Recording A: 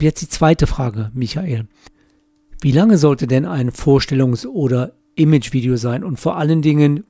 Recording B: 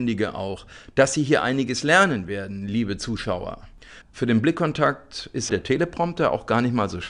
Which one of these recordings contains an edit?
B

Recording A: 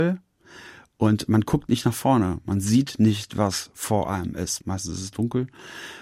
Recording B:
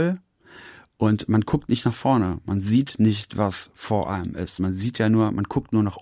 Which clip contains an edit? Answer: A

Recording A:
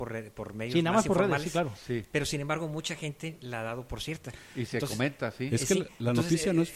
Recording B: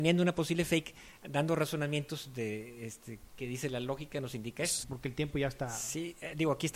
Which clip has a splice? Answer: B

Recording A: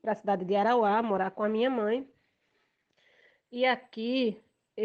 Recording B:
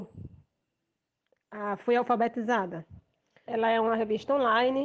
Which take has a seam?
B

